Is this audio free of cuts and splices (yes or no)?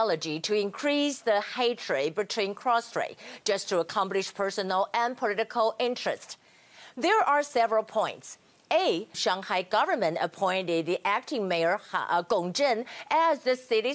no